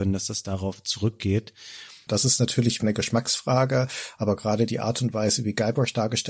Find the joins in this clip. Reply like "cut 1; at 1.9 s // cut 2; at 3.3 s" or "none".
cut 1; at 2.1 s

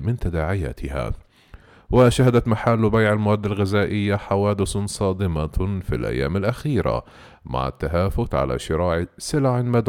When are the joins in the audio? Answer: none

